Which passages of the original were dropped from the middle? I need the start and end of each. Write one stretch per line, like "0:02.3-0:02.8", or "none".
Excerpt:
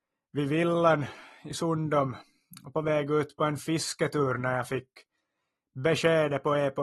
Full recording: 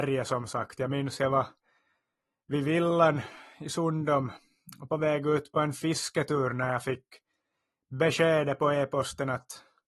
none